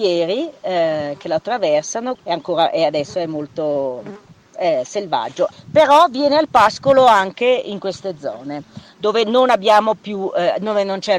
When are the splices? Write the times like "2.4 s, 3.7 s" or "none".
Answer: 2.2 s, 5.5 s